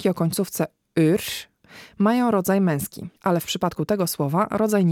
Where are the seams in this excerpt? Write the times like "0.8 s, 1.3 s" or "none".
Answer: 3.2 s